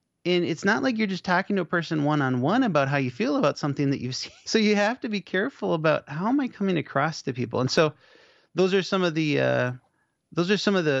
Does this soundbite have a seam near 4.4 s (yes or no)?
yes